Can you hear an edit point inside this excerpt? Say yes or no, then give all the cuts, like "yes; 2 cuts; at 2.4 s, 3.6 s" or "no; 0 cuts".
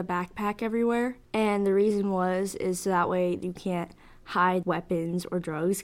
yes; 2 cuts; at 1.2 s, 4.6 s